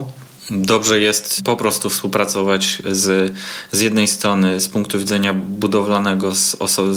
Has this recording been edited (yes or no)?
no